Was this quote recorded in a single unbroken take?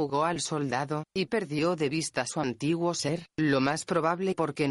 yes; 0 cuts

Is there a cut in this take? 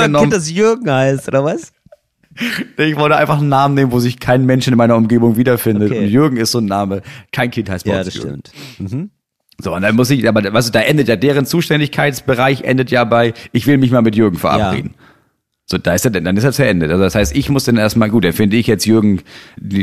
no; 0 cuts

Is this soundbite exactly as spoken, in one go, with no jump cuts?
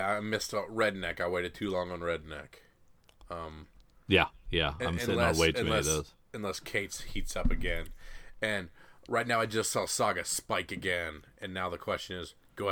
yes; 0 cuts

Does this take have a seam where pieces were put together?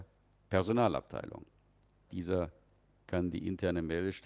yes; 1 cut; at 2.1 s

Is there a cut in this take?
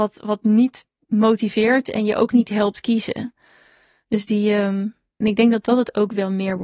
yes; 1 cut; at 5.2 s

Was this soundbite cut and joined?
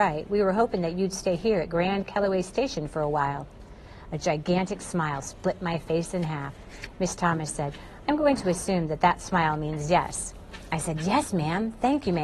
no; 0 cuts

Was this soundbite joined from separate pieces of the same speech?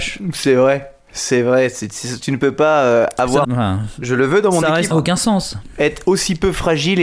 yes; 2 cuts; at 3.4 s, 4.9 s

